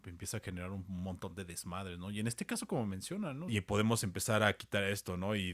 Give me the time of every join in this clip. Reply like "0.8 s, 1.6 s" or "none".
3.5 s